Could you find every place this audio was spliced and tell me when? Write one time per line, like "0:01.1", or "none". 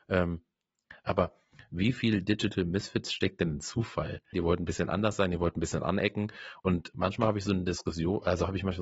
0:04.3